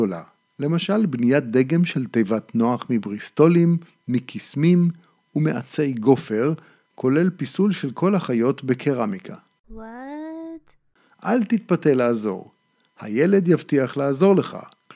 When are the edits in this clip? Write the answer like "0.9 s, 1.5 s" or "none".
none